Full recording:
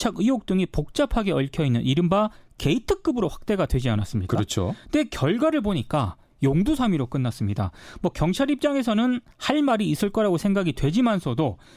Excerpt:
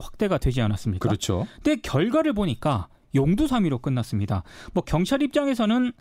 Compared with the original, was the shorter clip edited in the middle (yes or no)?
no